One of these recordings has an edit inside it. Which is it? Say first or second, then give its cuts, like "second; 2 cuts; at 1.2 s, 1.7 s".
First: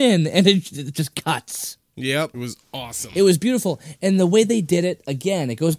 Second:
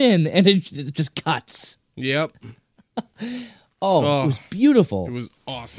first; 1 cut; at 2.3 s